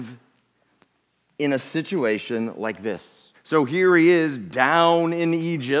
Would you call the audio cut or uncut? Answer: cut